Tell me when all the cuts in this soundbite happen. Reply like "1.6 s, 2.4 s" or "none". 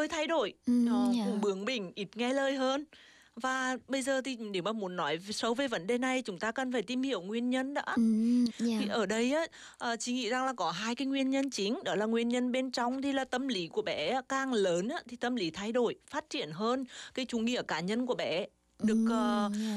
8.5 s, 17.3 s